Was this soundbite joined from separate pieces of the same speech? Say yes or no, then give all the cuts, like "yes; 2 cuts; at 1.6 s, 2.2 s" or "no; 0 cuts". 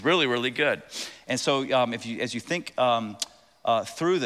no; 0 cuts